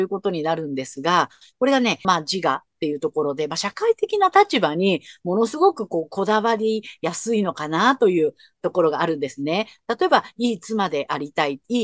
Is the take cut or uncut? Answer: cut